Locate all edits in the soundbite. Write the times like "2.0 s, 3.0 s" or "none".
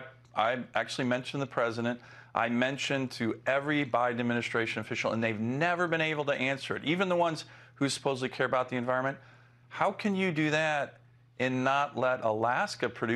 9.6 s